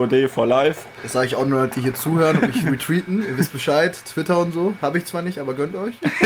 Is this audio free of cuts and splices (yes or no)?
yes